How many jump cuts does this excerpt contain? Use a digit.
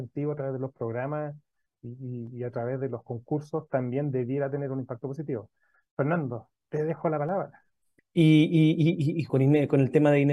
2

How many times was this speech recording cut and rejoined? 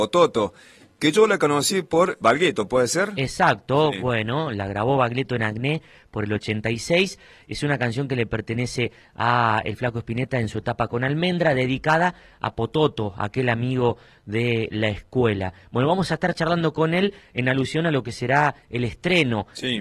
1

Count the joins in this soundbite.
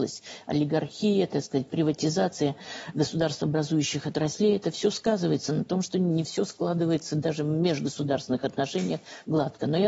0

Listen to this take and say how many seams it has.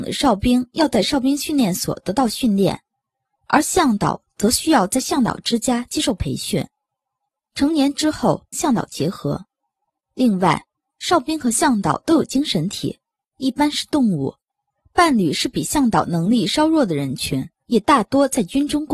3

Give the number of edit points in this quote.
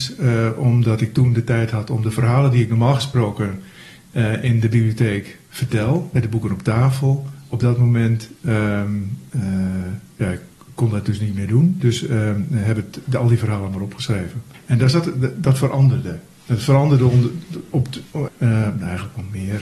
2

